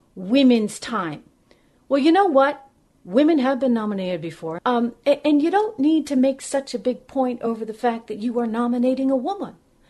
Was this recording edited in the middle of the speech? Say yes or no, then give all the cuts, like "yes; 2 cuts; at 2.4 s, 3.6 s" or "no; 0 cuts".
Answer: yes; 1 cut; at 4.6 s